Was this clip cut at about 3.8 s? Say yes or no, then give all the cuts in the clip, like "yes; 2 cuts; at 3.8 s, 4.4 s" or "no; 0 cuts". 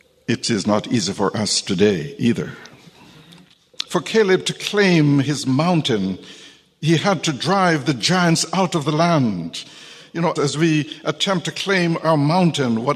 no; 1 cut; at 10.4 s